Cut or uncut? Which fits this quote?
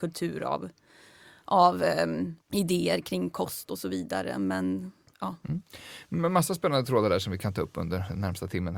cut